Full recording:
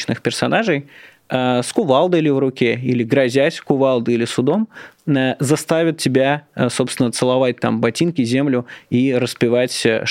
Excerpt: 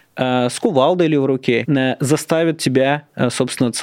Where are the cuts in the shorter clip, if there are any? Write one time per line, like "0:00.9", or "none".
0:01.6

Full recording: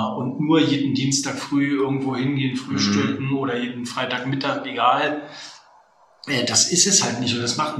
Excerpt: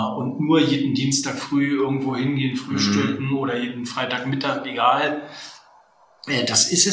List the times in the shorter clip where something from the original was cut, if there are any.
none

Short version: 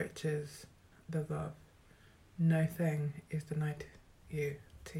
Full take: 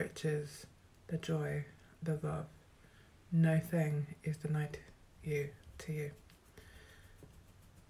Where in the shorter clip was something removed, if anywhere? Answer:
0:00.9

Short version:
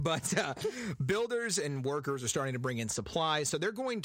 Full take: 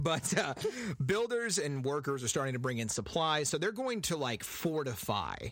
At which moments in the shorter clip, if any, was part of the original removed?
none

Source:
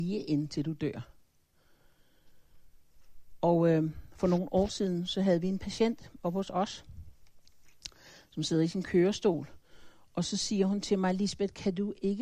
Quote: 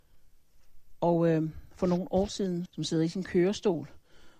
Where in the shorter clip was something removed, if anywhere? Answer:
0:02.7

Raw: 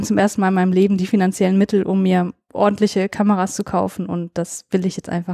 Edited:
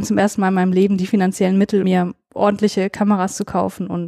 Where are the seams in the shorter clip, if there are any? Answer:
0:01.8

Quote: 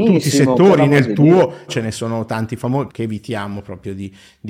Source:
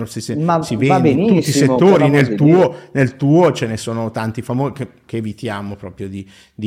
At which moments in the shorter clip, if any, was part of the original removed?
0:01.7
0:02.9

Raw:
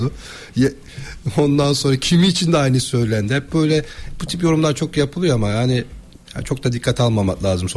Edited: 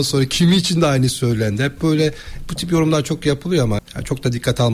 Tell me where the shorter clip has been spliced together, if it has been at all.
0:03.8

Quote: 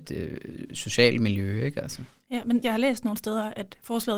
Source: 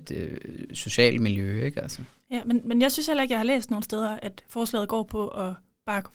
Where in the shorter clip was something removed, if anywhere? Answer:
0:02.6

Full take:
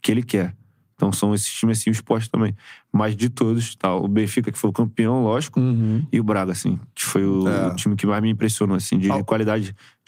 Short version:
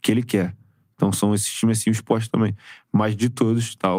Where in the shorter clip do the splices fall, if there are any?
none

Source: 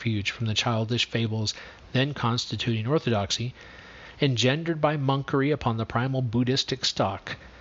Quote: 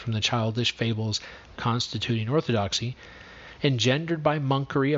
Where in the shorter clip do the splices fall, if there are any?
0:01.6

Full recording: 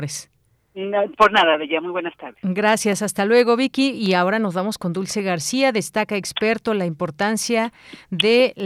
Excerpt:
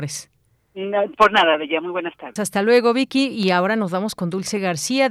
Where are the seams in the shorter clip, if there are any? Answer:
0:02.4

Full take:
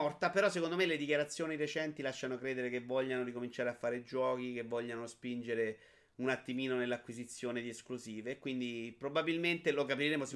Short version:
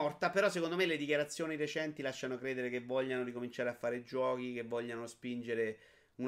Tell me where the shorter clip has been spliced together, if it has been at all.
none

